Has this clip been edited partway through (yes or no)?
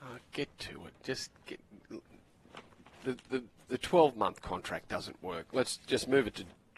no